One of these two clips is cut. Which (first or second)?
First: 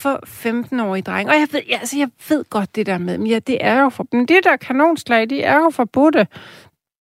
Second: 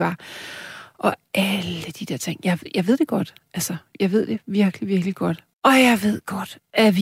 second